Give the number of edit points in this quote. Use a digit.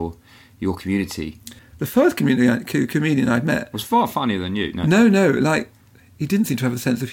1